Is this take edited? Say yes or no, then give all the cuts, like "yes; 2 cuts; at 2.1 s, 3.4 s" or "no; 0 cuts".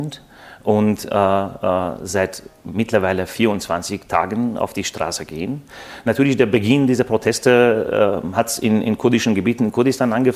no; 0 cuts